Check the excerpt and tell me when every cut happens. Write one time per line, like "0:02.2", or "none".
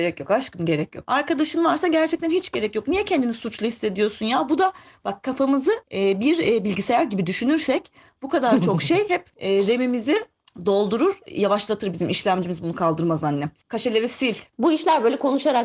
0:05.8